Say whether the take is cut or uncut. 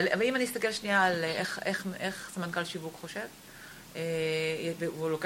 uncut